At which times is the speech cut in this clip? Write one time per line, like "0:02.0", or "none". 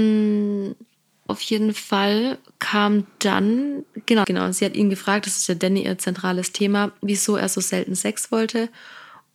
0:01.3
0:04.2